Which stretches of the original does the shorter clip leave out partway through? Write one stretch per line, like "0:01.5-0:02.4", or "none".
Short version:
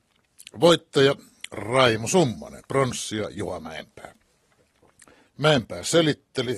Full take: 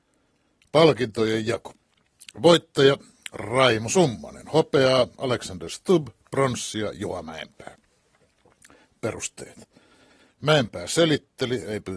0:04.4-0:06.2
0:08.8-0:10.2